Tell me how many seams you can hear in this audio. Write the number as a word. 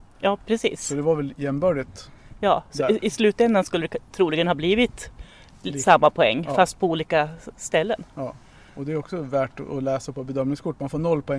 zero